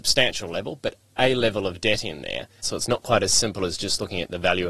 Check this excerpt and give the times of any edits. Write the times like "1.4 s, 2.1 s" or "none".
2.6 s